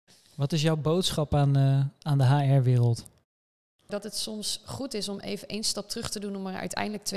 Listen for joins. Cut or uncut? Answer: uncut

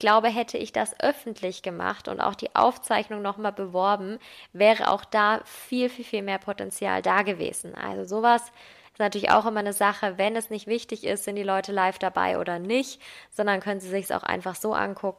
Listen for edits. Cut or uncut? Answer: uncut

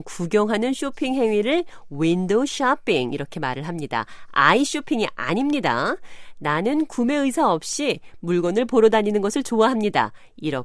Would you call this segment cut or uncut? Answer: uncut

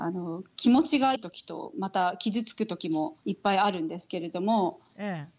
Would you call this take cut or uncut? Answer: cut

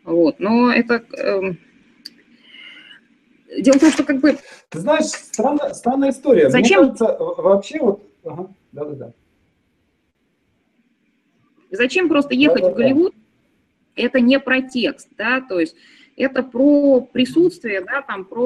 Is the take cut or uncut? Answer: uncut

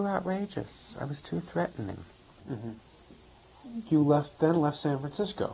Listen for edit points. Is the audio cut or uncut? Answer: uncut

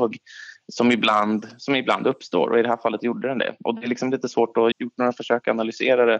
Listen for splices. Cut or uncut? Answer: cut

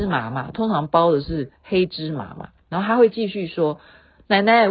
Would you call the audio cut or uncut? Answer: uncut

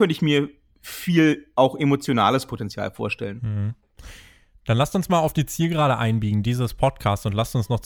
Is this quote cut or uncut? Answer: uncut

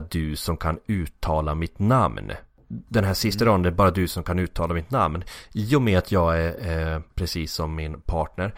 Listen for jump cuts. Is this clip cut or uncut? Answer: cut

